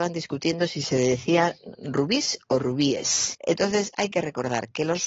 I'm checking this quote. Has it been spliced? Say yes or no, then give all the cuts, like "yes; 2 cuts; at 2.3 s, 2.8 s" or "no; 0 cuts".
yes; 1 cut; at 3.3 s